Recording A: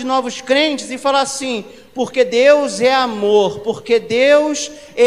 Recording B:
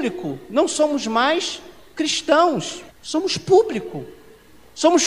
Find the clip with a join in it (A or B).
B